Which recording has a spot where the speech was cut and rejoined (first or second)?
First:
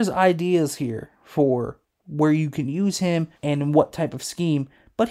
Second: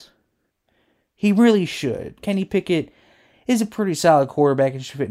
first